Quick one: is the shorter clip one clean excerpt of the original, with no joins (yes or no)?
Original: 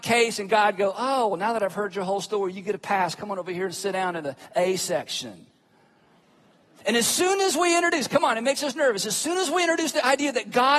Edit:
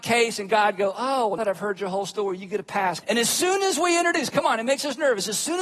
no